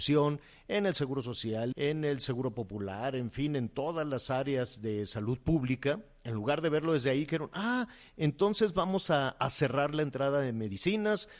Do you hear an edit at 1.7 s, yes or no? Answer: yes